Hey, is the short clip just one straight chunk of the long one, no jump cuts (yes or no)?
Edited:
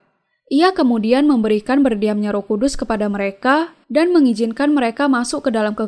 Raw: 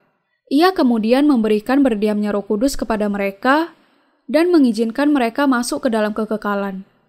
no